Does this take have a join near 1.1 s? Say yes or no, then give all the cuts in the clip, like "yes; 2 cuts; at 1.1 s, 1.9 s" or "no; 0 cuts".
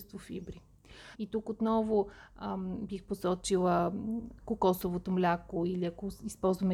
yes; 1 cut; at 1.1 s